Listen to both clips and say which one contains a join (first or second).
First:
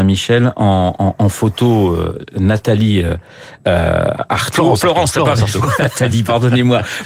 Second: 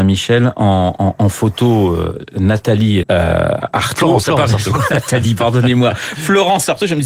second